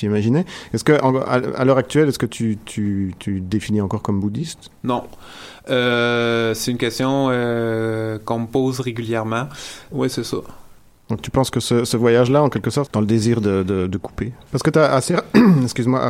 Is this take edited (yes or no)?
yes